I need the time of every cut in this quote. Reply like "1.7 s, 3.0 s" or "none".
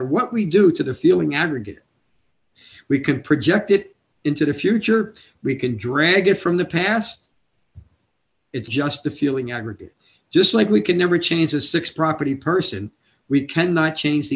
8.7 s